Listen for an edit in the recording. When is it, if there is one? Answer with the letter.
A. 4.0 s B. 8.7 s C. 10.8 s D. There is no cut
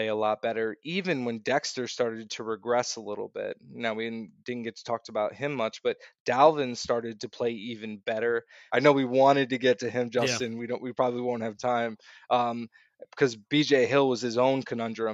B